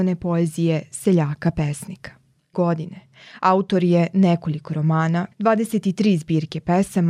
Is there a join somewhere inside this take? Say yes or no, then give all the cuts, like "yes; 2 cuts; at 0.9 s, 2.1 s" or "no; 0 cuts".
yes; 2 cuts; at 2.5 s, 5.3 s